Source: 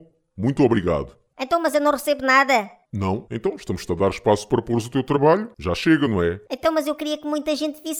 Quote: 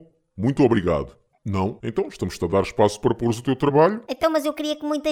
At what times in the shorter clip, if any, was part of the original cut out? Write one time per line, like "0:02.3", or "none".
0:01.3
0:04.1